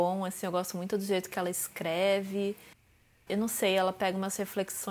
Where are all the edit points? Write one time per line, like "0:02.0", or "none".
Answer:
none

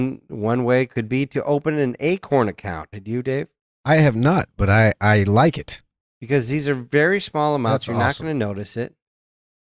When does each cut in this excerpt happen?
0:02.9
0:06.0

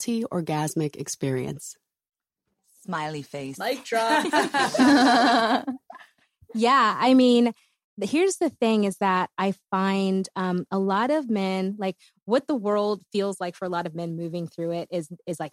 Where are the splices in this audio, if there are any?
none

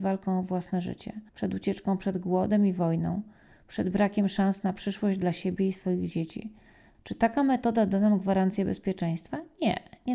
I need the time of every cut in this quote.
0:01.3
0:06.9

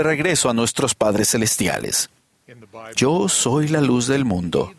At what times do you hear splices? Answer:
0:02.9

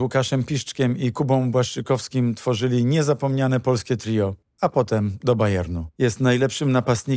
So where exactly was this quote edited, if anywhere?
0:05.9

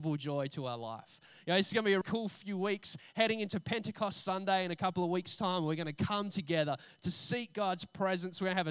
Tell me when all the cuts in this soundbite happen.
0:02.0

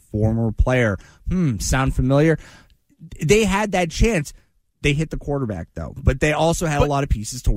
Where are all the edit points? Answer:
none

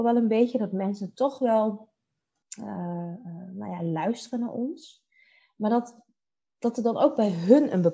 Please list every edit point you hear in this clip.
none

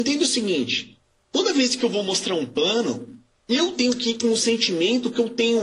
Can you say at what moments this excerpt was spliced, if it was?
none

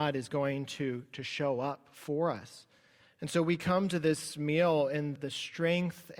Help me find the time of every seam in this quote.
0:03.1
0:05.2

